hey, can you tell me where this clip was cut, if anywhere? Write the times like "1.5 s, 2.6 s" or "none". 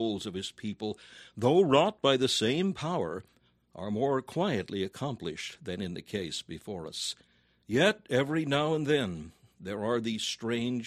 7.6 s